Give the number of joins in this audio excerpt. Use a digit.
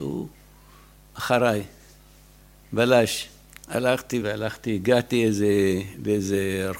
1